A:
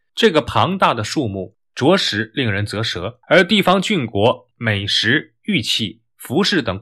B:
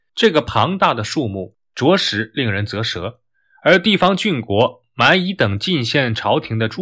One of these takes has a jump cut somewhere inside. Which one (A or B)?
A